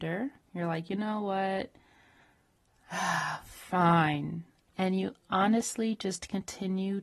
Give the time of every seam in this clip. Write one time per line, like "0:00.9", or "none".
0:04.7